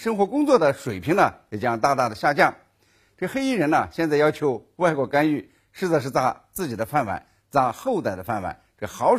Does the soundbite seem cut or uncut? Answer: uncut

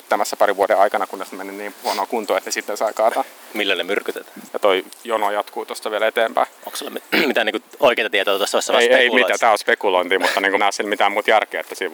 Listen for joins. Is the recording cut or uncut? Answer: cut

